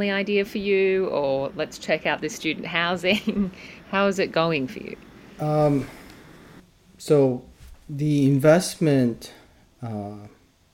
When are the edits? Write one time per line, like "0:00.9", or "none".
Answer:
none